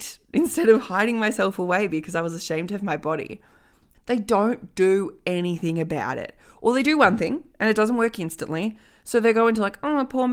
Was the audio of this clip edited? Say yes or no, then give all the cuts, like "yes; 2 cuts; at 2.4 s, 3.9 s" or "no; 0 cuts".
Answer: yes; 1 cut; at 3.9 s